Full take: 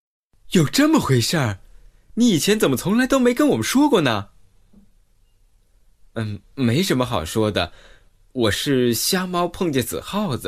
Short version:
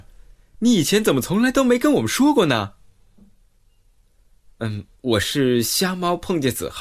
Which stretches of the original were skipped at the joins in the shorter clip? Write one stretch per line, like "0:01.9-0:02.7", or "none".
0:06.5-0:08.3

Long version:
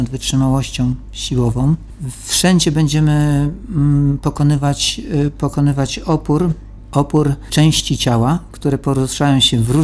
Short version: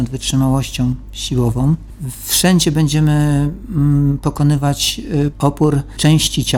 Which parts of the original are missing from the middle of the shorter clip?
0:05.3-0:06.9

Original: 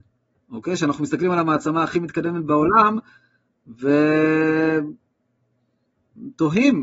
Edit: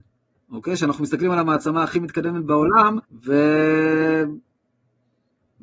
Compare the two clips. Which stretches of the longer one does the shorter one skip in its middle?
0:03.0-0:03.6

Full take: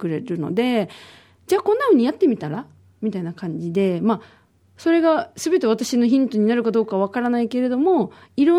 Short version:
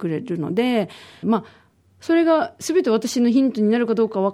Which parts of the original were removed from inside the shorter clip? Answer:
0:01.2-0:04.0

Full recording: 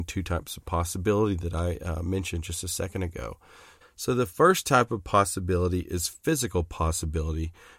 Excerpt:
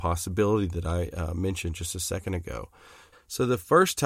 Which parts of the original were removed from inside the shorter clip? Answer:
none

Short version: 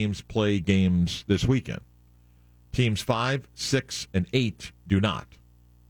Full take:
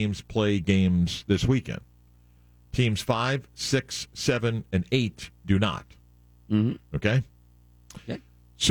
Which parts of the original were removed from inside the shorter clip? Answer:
0:04.1-0:04.7

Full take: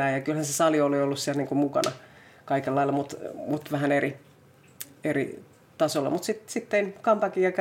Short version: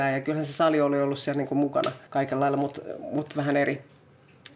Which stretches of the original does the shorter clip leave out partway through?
0:02.1-0:02.4

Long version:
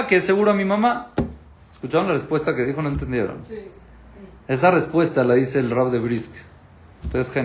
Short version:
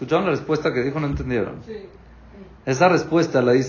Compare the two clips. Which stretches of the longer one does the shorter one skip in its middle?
none

